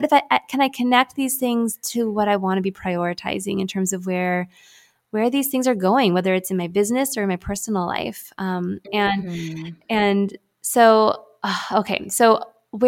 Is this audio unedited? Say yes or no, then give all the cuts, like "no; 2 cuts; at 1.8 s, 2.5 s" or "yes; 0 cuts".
yes; 0 cuts